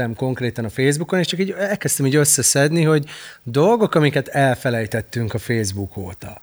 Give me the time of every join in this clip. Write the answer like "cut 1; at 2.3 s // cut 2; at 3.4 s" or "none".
none